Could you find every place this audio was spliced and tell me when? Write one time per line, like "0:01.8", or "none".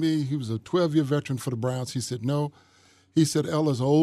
none